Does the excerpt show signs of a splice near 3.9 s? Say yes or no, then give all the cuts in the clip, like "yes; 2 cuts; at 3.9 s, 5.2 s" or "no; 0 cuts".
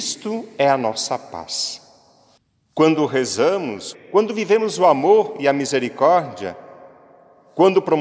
yes; 1 cut; at 3.9 s